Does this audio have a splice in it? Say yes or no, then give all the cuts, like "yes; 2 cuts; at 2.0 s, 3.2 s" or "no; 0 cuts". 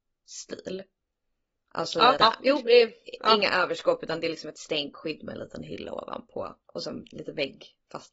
yes; 2 cuts; at 2.2 s, 6.6 s